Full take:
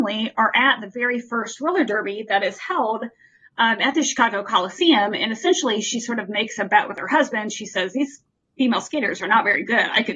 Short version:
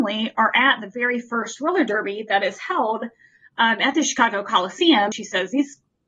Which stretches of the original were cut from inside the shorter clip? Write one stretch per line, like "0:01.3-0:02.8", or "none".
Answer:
0:05.1-0:07.5